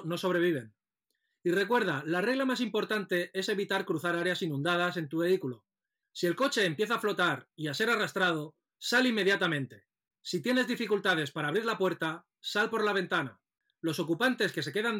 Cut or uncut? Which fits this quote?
cut